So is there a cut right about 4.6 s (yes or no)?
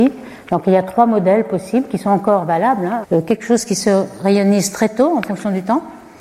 no